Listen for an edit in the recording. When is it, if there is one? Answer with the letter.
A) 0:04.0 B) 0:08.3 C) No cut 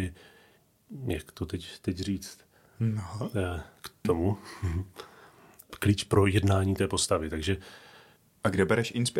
A